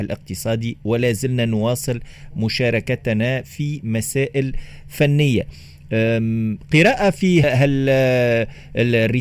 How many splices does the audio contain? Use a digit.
1